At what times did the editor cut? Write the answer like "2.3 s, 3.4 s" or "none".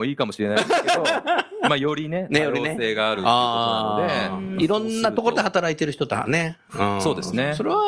none